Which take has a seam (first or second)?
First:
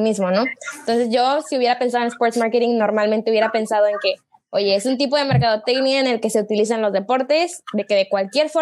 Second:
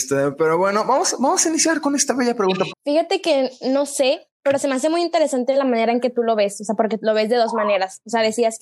second